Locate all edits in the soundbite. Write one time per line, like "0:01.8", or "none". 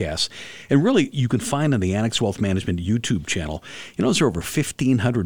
0:01.1